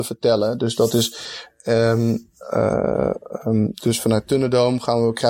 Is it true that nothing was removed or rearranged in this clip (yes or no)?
yes